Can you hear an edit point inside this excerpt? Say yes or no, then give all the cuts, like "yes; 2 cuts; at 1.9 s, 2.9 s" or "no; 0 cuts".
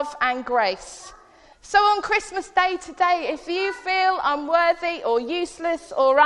yes; 1 cut; at 1.5 s